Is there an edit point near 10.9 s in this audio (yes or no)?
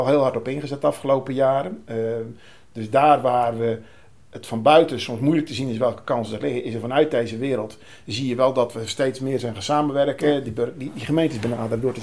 no